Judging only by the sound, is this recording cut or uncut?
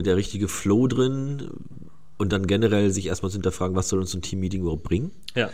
uncut